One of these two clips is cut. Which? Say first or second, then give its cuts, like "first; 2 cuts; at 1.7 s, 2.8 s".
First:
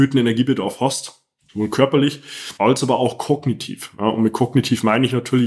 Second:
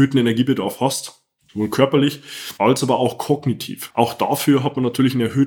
second; 1 cut; at 3.9 s